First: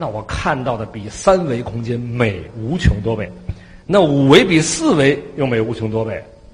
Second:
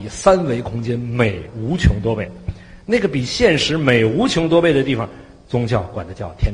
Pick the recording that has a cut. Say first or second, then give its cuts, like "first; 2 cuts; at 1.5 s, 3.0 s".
first; 1 cut; at 3.8 s